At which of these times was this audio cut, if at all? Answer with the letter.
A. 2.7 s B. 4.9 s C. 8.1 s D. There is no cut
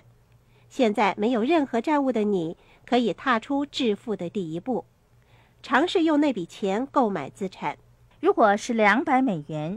C